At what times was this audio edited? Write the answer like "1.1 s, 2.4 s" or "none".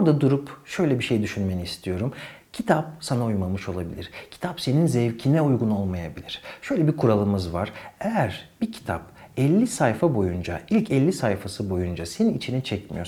none